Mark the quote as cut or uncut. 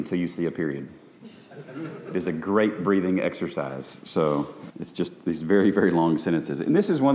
cut